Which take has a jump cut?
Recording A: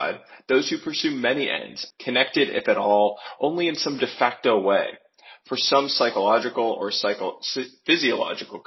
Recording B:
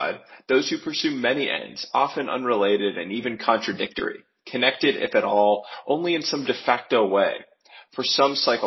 A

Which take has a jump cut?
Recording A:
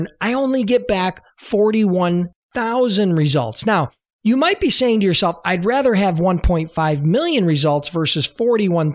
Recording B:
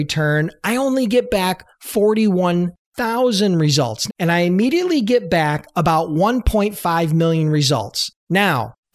B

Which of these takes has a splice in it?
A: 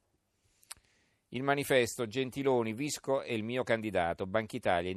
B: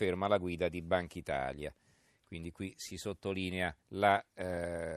B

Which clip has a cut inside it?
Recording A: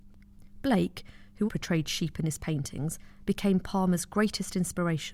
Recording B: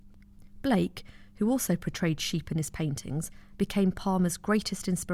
A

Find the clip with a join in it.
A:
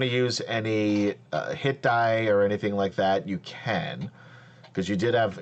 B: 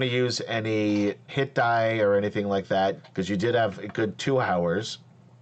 B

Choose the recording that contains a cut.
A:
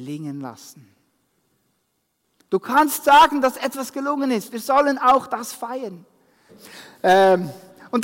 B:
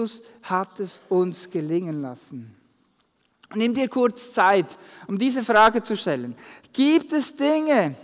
A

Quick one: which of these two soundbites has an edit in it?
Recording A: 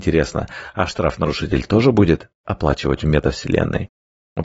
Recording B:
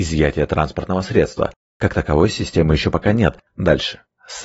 B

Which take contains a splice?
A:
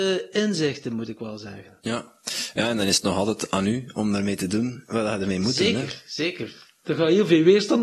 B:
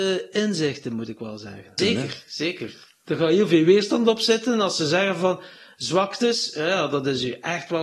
B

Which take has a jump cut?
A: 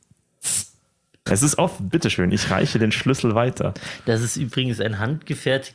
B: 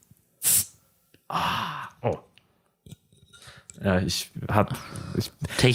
A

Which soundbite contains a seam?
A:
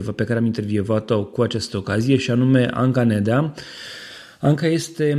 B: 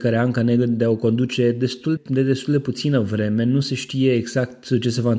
B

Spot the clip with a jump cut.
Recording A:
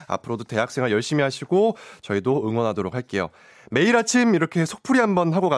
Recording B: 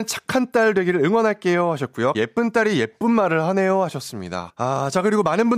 B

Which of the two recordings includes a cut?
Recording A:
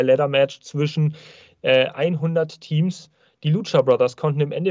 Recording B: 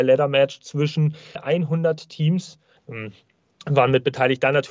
B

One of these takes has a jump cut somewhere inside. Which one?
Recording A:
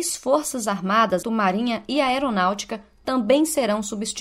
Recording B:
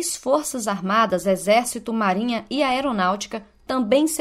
A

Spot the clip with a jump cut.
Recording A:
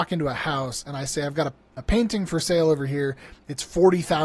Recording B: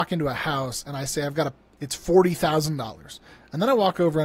B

